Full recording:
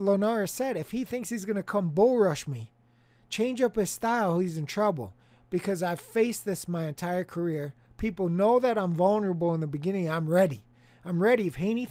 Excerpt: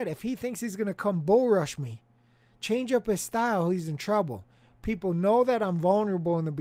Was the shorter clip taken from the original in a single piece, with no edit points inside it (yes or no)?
no